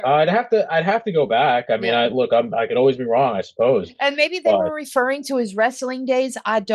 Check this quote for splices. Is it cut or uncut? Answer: uncut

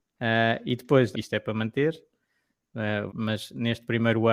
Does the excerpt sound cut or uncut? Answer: cut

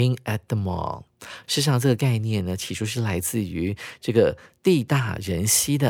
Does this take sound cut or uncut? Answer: cut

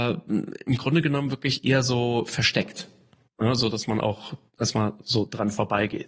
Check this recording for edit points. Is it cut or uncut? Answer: uncut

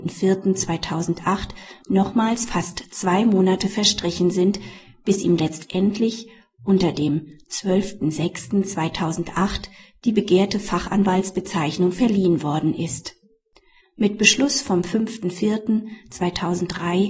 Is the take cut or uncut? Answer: cut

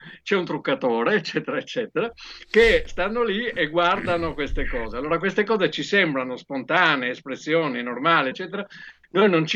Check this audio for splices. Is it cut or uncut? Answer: cut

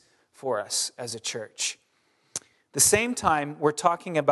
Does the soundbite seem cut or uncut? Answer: uncut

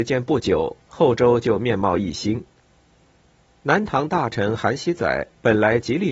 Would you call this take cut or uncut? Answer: uncut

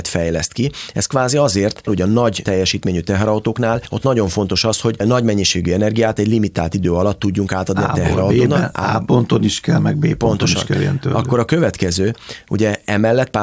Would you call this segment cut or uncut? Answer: cut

